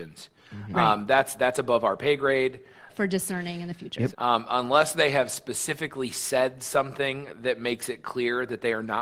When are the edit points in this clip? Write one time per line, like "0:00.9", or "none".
0:02.9
0:04.1